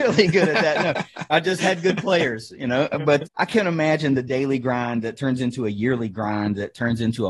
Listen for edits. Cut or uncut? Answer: cut